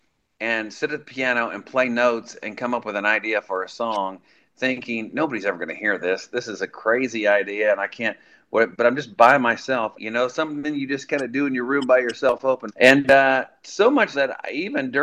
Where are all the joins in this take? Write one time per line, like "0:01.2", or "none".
0:10.0
0:12.7
0:14.1